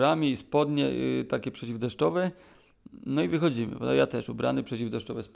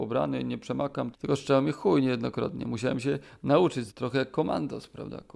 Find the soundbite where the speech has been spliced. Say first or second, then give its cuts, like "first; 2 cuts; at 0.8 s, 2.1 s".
second; 2 cuts; at 1.1 s, 3.9 s